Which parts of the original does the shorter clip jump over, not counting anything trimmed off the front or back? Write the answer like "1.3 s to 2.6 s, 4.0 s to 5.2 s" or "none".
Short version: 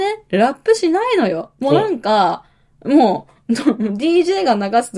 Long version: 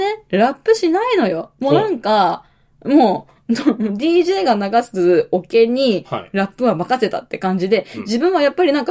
none